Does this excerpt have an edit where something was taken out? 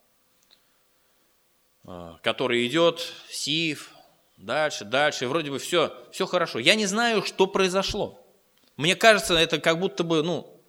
no; 0 cuts

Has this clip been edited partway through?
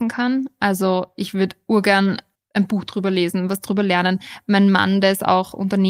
yes; 1 cut; at 2.4 s

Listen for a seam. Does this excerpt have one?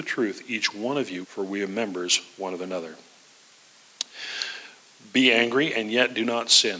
yes; 1 cut; at 1.2 s

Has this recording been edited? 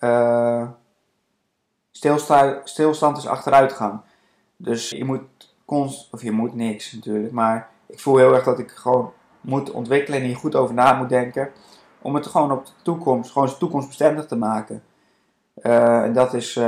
yes; 1 cut; at 4.9 s

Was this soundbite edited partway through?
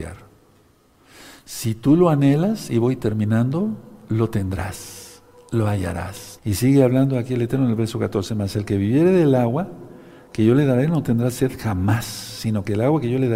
yes; 1 cut; at 6.4 s

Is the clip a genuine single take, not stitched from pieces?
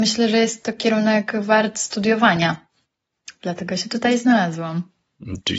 yes; 0 cuts

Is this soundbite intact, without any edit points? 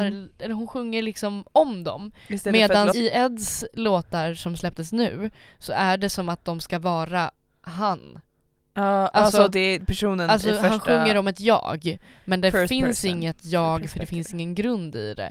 no; 1 cut; at 2.9 s

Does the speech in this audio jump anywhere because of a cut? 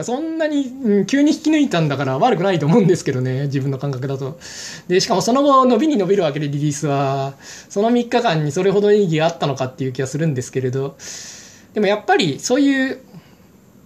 no; 0 cuts

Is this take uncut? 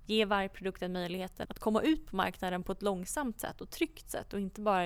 no; 1 cut; at 1.4 s

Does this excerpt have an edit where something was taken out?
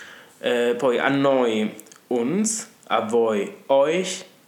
no; 0 cuts

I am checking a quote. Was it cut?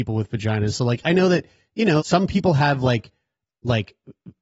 yes; 1 cut; at 2.0 s

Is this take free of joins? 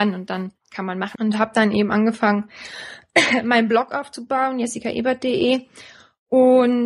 no; 1 cut; at 1.1 s

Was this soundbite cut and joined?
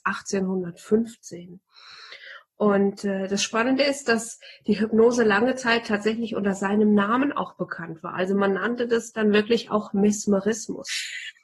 no; 0 cuts

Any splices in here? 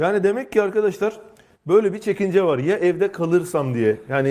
no; 0 cuts

